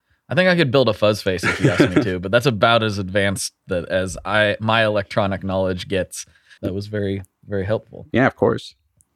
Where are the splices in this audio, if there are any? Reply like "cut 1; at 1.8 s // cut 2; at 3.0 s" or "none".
cut 1; at 6.6 s